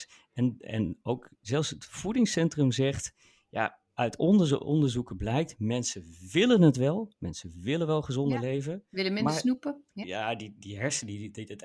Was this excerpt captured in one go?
no; 1 cut; at 10.0 s

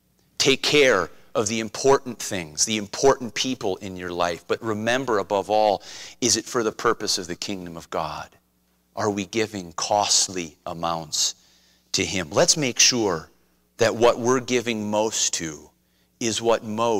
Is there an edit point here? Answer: no; 0 cuts

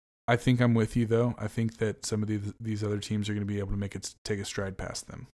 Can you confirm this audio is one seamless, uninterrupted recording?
yes; 0 cuts

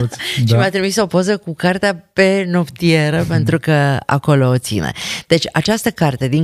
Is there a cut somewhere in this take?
no; 0 cuts

